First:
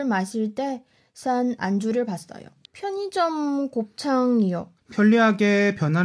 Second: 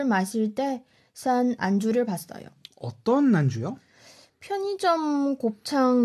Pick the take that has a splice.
first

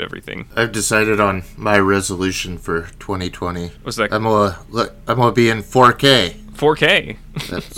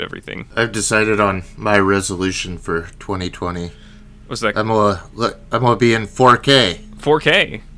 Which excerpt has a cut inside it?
first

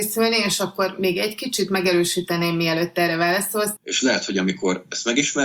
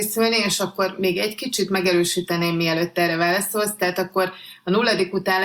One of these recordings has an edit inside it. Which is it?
first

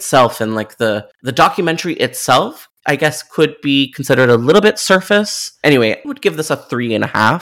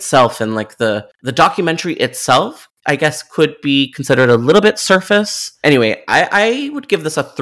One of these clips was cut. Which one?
first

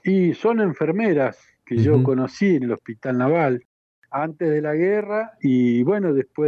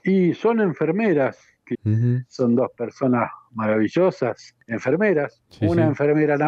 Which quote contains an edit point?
second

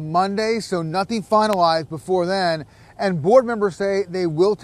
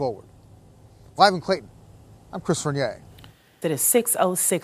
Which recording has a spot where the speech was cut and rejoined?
second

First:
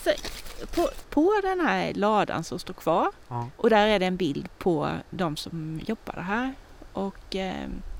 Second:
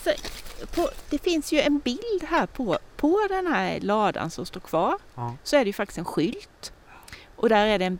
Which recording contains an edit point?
first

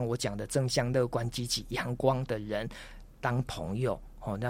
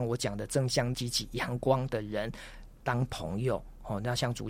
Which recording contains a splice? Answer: second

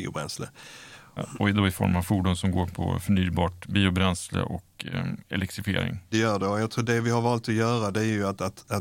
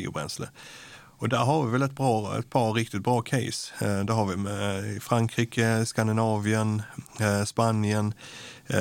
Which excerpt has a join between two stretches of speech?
first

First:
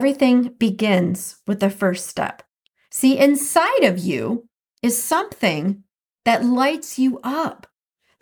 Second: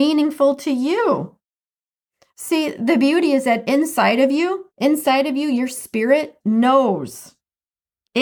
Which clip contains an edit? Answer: second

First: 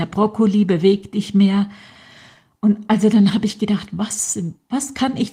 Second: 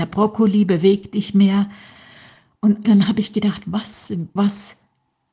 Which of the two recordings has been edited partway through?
second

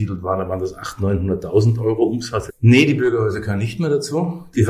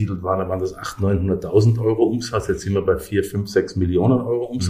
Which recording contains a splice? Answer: first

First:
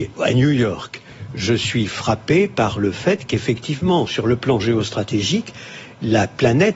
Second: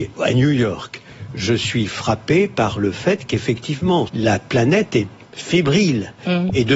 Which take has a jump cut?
second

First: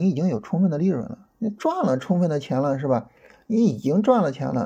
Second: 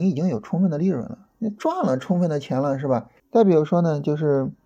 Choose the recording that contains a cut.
second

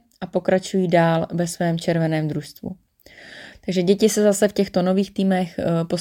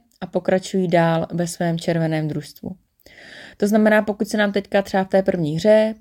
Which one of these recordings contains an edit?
first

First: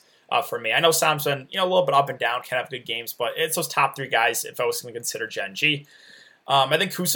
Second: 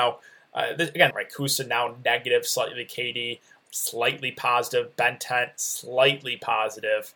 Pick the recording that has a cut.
second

